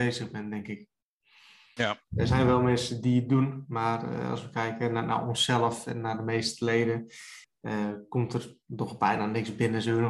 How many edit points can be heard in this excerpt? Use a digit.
2